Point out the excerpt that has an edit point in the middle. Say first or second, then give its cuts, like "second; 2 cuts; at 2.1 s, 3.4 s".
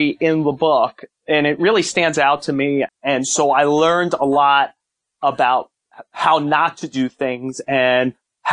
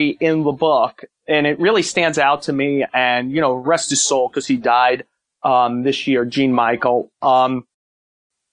first; 1 cut; at 2.9 s